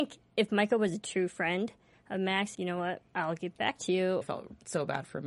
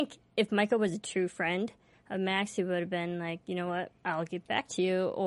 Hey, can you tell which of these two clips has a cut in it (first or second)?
first